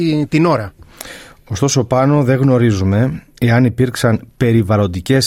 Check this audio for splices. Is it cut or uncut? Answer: uncut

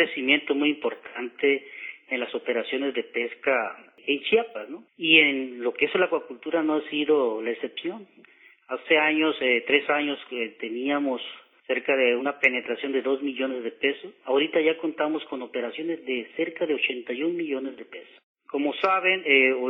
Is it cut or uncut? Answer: cut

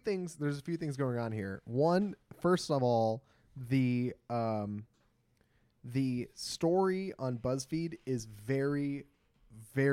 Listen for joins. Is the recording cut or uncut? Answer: uncut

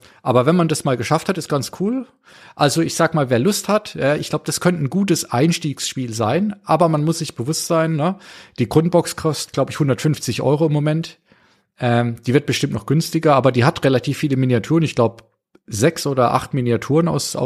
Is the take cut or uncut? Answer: uncut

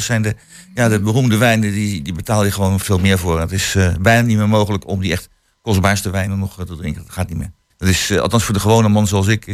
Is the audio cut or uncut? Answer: cut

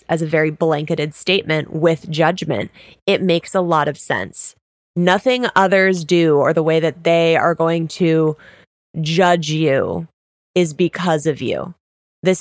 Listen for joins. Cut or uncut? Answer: uncut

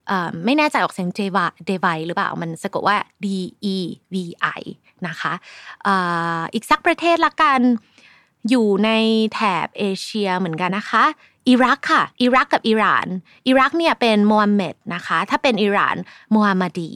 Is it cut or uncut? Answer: cut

